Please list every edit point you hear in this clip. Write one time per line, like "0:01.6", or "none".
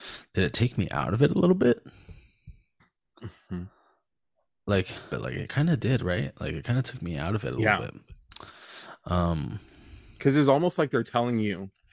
0:05.1